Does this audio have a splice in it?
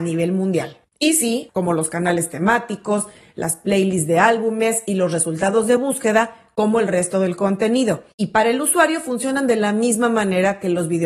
yes; 2 cuts; at 1.5 s, 8.1 s

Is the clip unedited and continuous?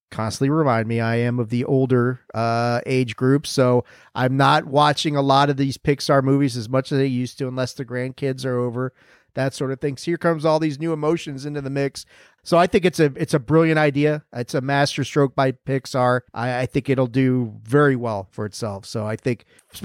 no; 3 cuts; at 10.0 s, 12.4 s, 16.3 s

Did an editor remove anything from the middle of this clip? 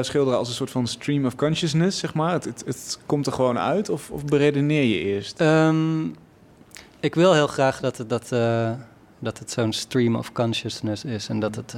yes; 1 cut; at 2.6 s

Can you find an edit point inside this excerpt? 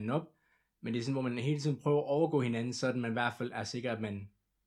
no; 0 cuts

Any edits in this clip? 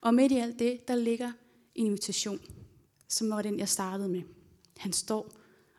no; 0 cuts

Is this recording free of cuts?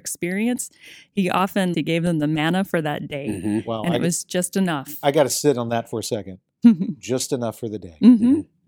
no; 1 cut; at 1.7 s

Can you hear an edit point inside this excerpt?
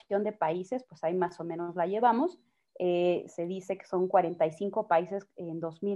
no; 0 cuts

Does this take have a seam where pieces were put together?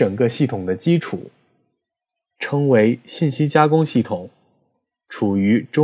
yes; 1 cut; at 2.4 s

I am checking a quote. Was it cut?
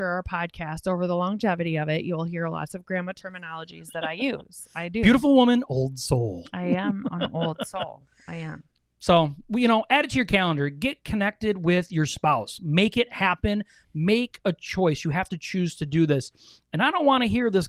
no; 0 cuts

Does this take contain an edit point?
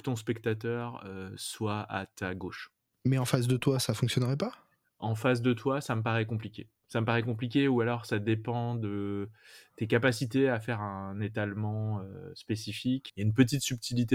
yes; 2 cuts; at 2.9 s, 13.1 s

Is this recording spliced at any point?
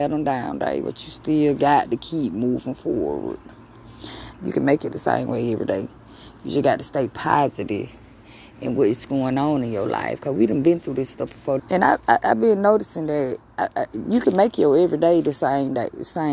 yes; 2 cuts; at 4.3 s, 11.6 s

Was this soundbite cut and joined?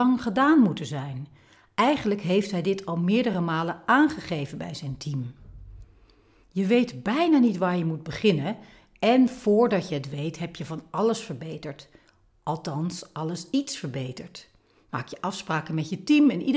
no; 0 cuts

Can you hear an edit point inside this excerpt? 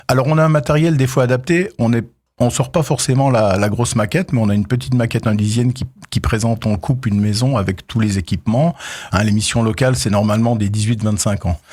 yes; 1 cut; at 9.1 s

